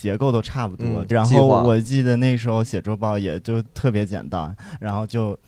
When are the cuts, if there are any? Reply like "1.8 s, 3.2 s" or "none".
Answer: 1.1 s